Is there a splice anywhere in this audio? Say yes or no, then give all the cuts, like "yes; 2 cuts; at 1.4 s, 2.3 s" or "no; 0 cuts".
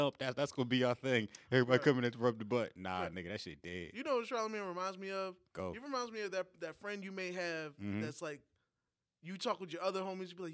no; 0 cuts